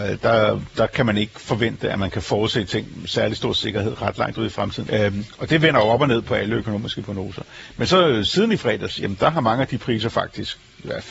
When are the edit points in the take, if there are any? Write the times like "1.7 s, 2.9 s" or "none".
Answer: 4.9 s